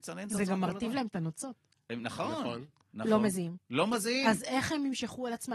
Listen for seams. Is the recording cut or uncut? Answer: uncut